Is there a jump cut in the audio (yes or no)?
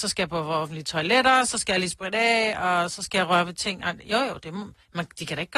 no